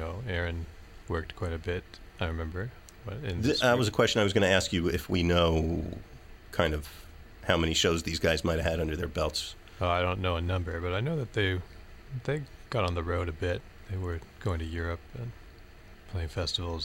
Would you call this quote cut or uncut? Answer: uncut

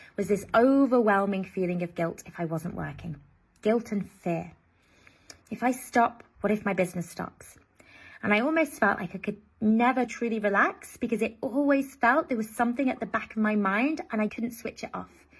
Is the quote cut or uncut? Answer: cut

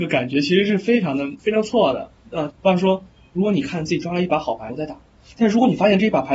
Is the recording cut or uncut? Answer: cut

